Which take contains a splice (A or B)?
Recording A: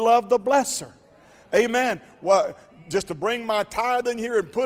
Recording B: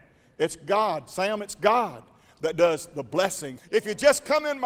B